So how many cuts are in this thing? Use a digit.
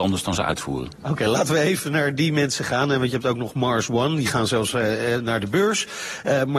0